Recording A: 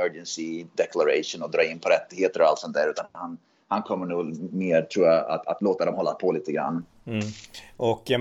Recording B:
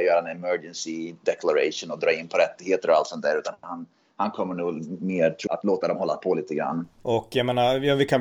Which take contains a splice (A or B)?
B